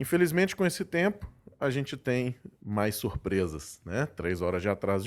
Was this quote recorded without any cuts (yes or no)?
yes